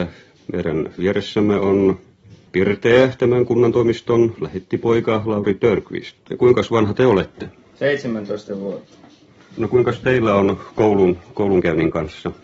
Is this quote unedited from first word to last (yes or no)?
yes